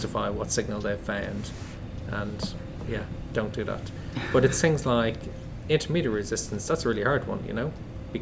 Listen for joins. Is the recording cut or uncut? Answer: cut